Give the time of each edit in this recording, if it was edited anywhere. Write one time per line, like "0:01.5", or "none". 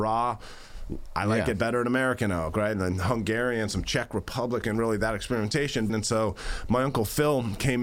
0:04.6
0:05.9